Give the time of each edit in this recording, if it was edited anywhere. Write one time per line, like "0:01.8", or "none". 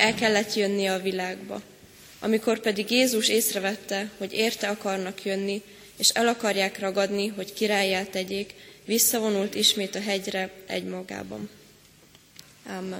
none